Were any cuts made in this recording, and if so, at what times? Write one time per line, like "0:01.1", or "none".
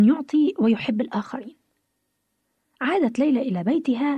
none